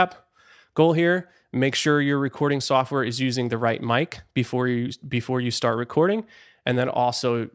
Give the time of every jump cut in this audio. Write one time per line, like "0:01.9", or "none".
none